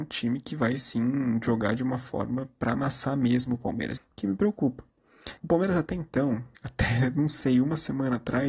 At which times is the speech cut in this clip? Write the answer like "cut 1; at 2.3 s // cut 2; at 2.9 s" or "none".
cut 1; at 4.0 s // cut 2; at 5.4 s // cut 3; at 6.6 s